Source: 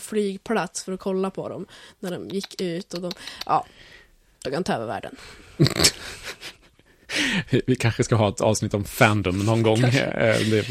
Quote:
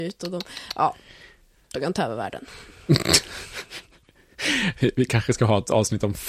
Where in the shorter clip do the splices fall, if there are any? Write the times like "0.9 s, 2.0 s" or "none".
none